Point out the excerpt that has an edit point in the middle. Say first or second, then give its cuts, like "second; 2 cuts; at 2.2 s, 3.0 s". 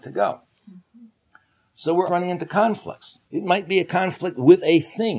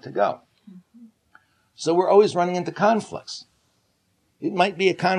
first; 2 cuts; at 2.1 s, 3.3 s